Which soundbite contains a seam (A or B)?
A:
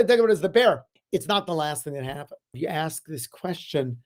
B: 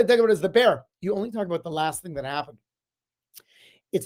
A